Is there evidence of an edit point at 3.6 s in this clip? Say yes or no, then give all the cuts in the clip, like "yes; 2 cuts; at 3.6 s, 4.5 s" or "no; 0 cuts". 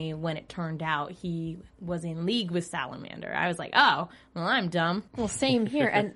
no; 1 cut; at 5.1 s